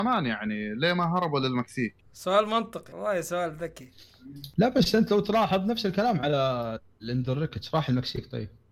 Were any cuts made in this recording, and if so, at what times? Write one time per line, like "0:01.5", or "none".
0:02.0